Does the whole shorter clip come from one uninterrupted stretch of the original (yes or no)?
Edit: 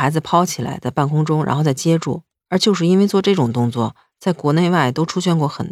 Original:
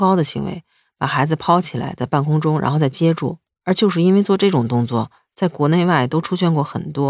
yes